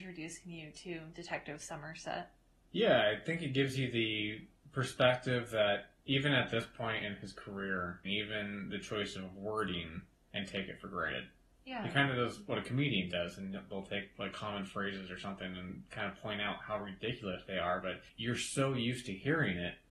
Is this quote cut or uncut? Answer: cut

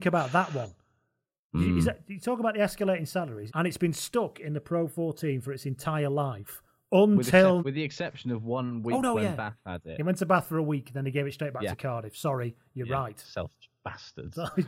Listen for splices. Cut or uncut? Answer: cut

